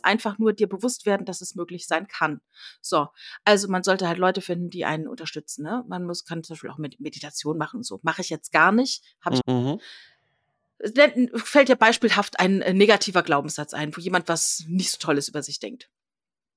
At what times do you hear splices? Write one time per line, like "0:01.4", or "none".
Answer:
0:09.4